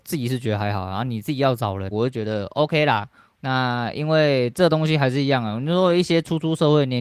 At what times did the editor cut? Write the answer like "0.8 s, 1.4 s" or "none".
1.9 s, 3.3 s